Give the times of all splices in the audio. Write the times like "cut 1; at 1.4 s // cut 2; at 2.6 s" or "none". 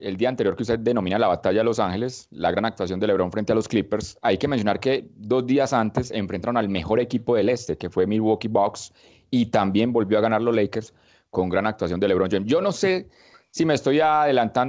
none